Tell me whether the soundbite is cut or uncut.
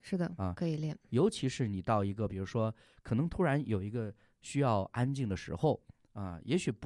uncut